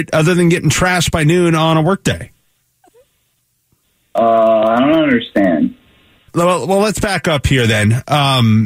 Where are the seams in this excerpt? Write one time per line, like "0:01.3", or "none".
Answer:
0:06.3